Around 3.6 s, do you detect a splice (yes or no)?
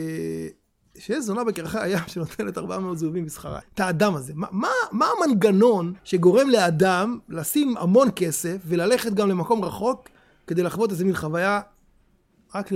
yes